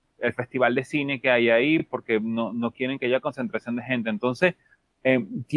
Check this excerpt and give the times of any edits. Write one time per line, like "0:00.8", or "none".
none